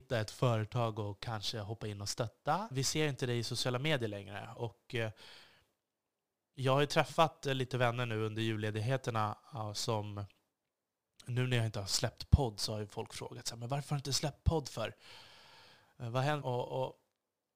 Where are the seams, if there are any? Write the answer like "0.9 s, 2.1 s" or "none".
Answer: 2.7 s, 4.6 s, 16.4 s